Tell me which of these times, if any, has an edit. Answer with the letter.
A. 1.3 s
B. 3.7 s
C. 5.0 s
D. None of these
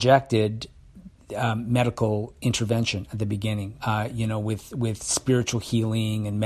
B